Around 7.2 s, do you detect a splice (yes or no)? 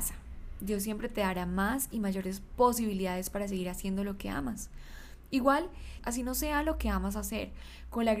no